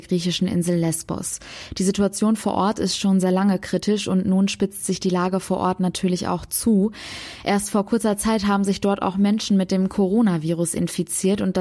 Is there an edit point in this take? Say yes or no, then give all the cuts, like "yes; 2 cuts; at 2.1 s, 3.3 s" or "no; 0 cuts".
no; 0 cuts